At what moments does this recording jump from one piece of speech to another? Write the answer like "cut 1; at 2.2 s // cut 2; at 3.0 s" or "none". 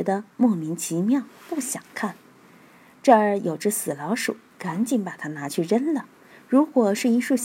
none